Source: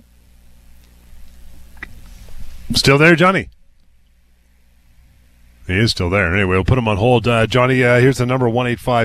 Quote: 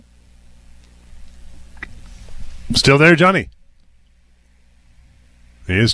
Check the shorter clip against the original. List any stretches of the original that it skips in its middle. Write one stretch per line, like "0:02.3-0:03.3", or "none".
none